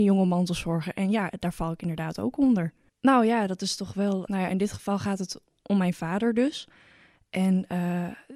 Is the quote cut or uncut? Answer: cut